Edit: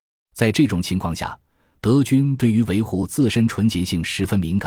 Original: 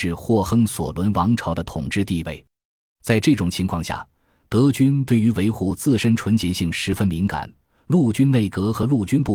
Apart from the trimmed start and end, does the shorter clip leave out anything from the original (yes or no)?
no